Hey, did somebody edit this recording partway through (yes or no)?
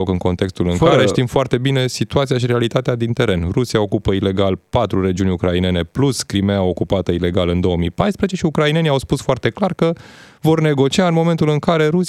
no